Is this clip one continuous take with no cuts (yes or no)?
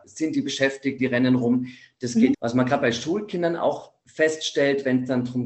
no